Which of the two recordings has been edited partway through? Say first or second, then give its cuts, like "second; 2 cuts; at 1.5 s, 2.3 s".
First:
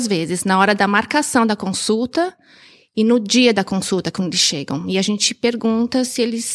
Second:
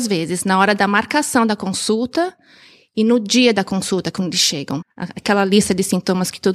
second; 1 cut; at 4.8 s